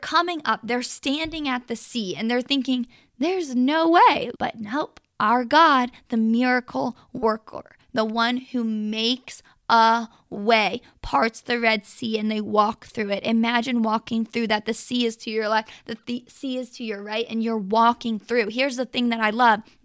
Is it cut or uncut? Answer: cut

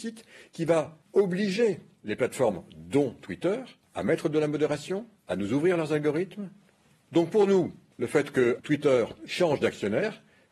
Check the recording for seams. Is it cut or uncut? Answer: cut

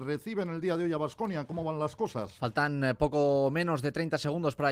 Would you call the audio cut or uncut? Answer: uncut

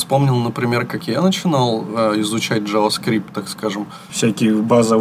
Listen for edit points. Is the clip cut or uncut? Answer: cut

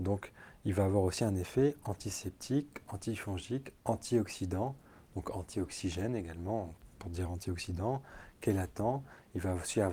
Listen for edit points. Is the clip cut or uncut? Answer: uncut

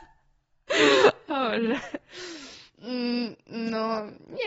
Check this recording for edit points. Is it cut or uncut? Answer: uncut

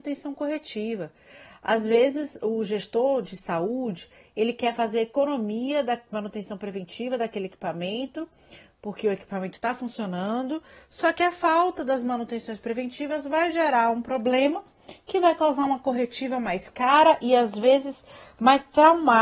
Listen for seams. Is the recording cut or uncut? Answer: uncut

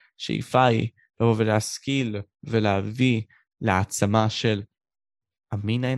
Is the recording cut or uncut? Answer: uncut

